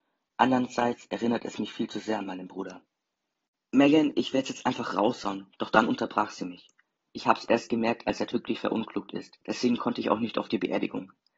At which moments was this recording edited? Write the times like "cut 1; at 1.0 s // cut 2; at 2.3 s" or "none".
cut 1; at 7.1 s // cut 2; at 9.4 s